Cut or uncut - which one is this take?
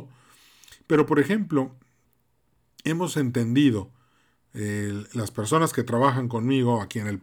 uncut